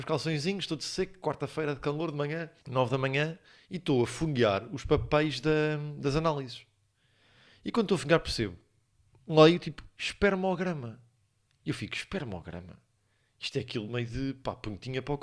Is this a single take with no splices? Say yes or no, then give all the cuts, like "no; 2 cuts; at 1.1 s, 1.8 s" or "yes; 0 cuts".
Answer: no; 1 cut; at 2.6 s